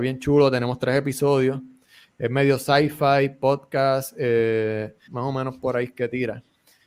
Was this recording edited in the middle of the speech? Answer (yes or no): yes